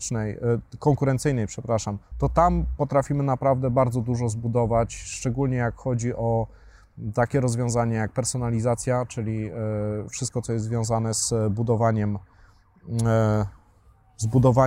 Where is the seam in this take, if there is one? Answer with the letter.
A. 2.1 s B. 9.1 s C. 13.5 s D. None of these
A